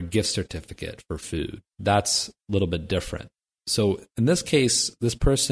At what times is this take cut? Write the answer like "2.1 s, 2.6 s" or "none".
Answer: 1.7 s